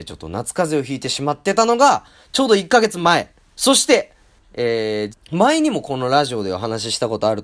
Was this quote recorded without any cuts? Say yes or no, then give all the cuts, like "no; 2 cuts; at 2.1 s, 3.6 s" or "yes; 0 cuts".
no; 2 cuts; at 3.5 s, 5.1 s